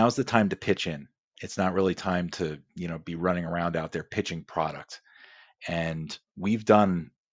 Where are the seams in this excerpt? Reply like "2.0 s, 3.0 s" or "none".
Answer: none